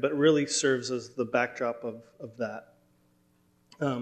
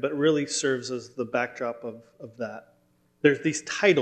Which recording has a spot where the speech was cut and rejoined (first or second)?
second